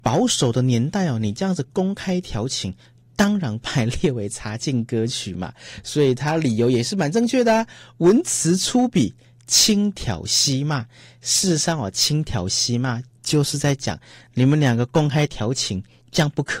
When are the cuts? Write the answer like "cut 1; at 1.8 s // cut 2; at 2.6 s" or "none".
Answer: none